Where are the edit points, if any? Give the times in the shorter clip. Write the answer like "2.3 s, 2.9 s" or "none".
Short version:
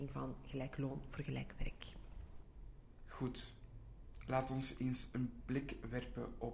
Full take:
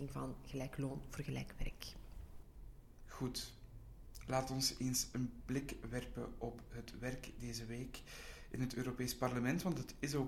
none